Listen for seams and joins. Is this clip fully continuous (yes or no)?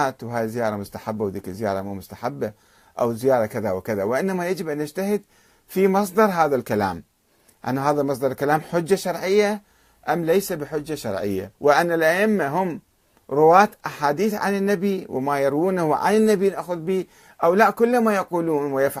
no